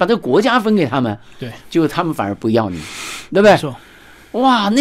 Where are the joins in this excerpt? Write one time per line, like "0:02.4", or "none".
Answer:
none